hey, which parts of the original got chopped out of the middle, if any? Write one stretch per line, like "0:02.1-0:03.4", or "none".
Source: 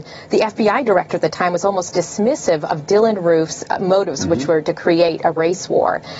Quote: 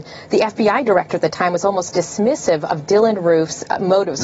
none

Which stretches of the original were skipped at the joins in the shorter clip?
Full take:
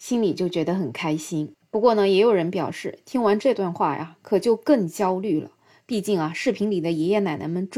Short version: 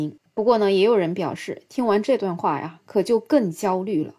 none

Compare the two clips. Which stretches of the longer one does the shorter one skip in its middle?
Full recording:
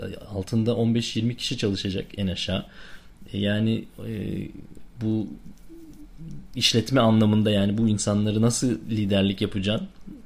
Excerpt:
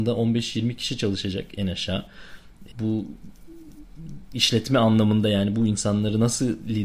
0:03.3-0:04.9

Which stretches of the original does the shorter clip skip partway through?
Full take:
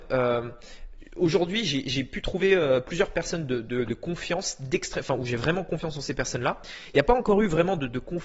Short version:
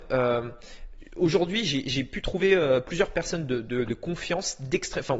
none

